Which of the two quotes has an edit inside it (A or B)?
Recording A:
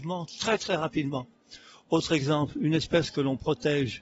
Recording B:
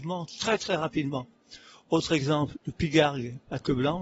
B